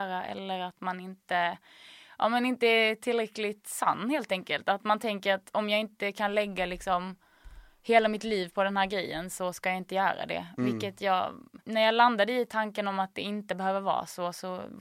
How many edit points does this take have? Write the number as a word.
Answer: one